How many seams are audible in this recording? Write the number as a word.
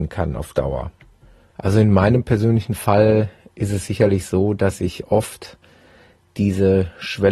one